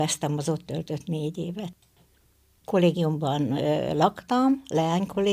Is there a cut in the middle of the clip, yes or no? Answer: yes